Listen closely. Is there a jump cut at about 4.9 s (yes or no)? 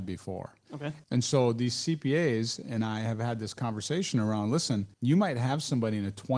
yes